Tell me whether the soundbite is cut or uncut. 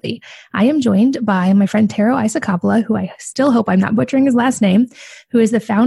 uncut